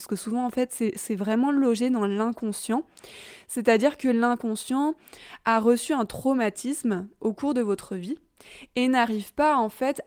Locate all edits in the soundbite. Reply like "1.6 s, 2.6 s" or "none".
none